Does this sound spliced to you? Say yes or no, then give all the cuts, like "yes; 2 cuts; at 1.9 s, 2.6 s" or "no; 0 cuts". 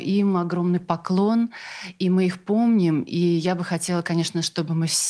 no; 0 cuts